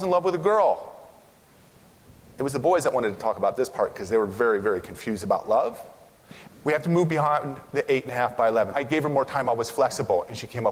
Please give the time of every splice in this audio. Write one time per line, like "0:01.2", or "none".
0:06.5
0:08.7